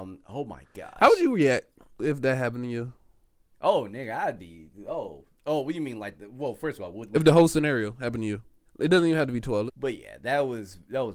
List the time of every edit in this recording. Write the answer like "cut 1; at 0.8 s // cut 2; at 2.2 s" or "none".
cut 1; at 8.7 s // cut 2; at 9.7 s